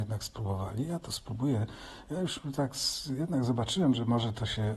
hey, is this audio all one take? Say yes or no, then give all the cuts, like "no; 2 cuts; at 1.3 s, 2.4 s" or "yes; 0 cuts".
yes; 0 cuts